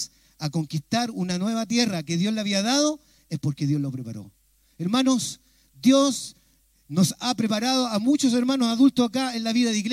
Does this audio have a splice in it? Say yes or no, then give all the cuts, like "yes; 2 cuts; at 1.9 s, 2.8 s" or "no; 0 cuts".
no; 0 cuts